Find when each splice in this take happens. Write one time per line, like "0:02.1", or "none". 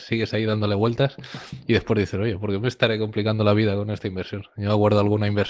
none